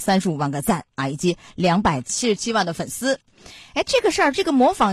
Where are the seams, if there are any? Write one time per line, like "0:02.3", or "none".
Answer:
none